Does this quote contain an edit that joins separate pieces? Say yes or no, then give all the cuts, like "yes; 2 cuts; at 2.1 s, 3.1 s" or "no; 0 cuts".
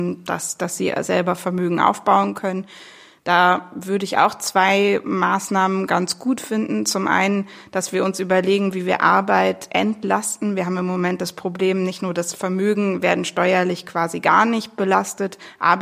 no; 0 cuts